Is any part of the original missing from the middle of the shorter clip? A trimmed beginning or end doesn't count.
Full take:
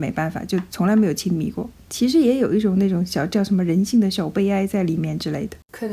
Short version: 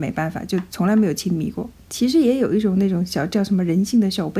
no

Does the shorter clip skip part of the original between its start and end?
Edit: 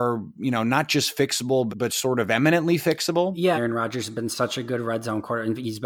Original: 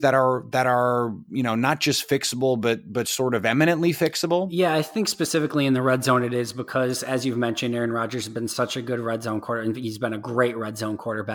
yes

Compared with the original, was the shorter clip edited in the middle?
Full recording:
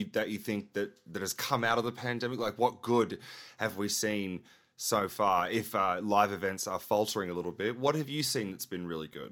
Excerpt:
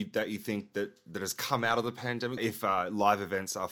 yes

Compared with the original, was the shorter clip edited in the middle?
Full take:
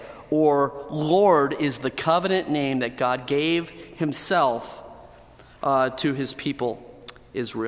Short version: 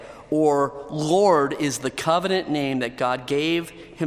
no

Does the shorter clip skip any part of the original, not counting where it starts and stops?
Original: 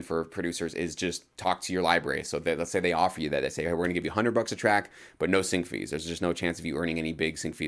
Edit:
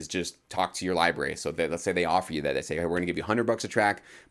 no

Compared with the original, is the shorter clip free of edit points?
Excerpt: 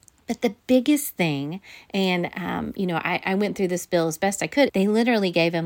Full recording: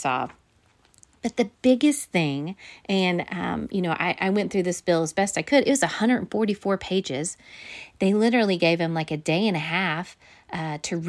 no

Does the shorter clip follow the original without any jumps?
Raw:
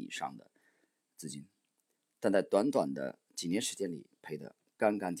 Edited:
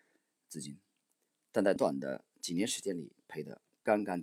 no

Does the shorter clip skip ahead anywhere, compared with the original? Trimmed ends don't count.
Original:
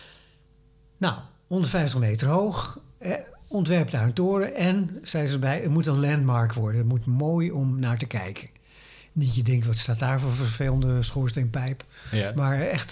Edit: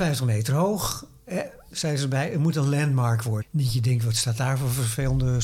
yes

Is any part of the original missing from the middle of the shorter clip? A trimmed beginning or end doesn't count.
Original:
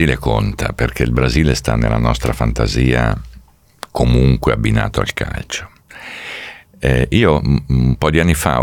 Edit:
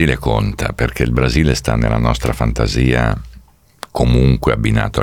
no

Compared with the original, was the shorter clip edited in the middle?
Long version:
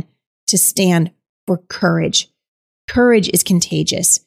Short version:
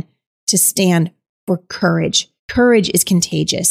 yes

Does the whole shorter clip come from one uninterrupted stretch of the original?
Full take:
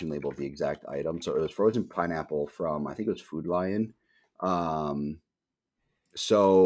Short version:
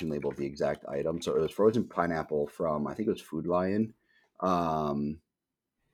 yes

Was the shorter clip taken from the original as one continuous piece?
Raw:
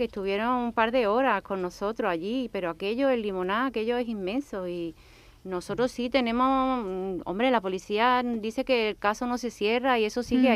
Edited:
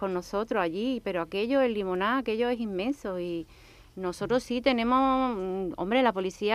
yes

